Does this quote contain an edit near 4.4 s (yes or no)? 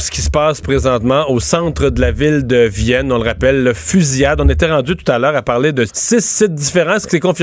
no